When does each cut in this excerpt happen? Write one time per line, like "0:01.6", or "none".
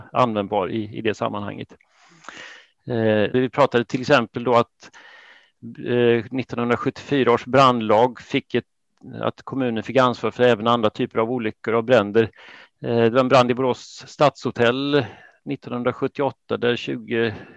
0:03.3
0:12.7